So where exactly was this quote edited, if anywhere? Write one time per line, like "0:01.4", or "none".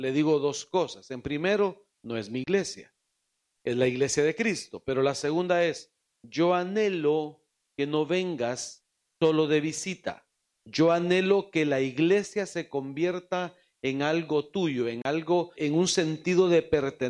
0:15.6